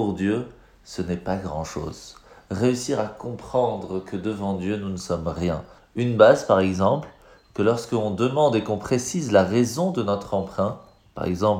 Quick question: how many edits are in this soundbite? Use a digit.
1